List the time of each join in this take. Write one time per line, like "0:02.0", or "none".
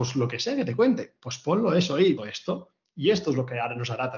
0:02.2

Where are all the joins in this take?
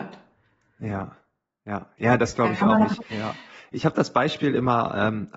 0:03.1

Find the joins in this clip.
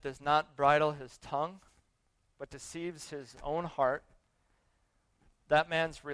none

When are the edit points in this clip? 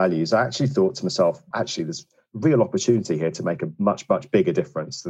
0:01.5

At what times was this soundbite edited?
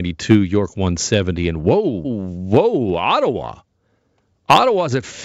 0:02.0

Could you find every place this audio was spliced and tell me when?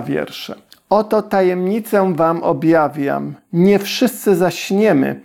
none

